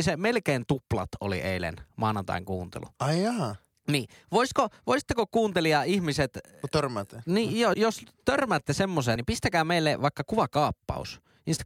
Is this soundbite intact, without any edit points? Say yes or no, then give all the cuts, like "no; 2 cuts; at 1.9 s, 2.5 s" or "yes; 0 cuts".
no; 2 cuts; at 7.7 s, 9.2 s